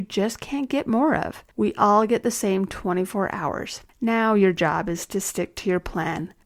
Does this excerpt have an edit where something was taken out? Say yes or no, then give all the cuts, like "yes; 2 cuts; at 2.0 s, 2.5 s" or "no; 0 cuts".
yes; 2 cuts; at 1.5 s, 3.9 s